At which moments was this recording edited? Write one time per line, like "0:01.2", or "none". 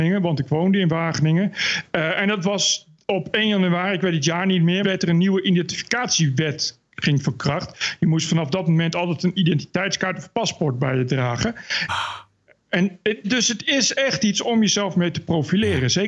0:04.8
0:11.9
0:13.2